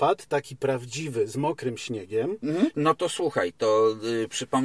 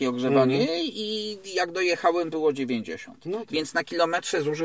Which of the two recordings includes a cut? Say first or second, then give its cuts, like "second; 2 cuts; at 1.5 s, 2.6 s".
first; 1 cut; at 2.7 s